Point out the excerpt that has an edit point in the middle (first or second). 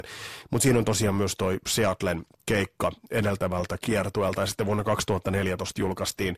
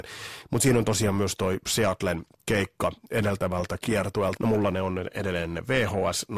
second